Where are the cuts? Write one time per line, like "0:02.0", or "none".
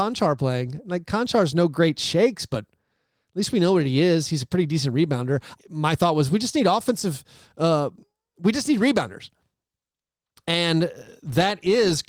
0:05.5